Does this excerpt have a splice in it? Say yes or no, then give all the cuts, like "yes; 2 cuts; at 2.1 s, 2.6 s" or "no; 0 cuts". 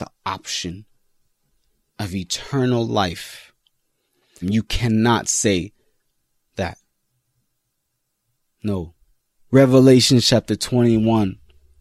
yes; 2 cuts; at 4.4 s, 9.3 s